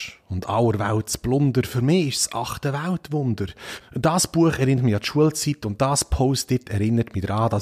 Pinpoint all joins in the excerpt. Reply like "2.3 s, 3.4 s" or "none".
3.8 s